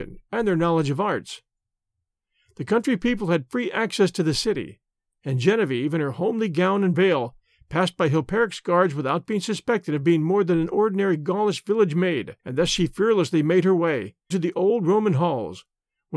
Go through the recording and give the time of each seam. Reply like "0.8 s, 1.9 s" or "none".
12.4 s, 14.3 s